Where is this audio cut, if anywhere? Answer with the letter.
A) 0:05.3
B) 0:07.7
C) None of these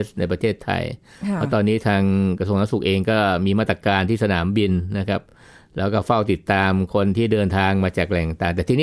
C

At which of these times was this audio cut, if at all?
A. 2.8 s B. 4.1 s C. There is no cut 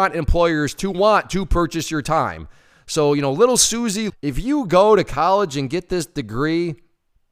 B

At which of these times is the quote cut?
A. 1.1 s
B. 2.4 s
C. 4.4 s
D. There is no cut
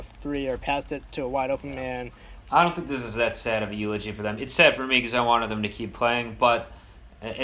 B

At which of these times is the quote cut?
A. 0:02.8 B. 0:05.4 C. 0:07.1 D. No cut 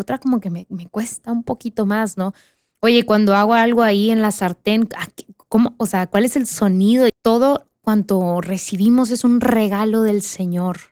C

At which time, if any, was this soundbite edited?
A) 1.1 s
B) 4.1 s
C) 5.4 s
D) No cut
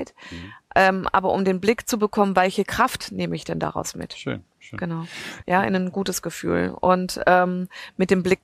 C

